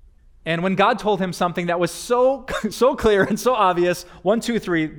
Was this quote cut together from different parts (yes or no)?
no